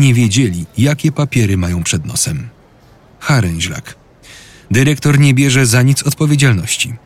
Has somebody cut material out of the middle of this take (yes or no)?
no